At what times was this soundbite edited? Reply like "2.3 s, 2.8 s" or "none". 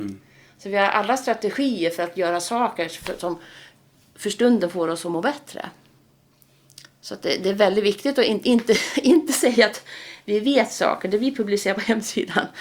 none